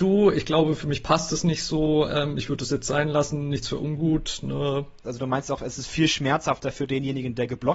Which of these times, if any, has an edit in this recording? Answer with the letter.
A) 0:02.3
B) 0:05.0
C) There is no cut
B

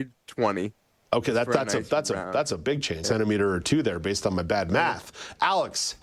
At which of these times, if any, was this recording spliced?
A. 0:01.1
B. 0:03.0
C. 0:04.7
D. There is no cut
B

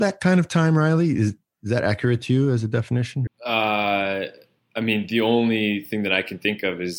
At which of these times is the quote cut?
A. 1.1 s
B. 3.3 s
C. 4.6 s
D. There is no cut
B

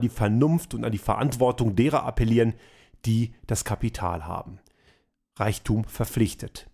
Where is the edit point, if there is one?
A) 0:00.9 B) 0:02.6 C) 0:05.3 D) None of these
D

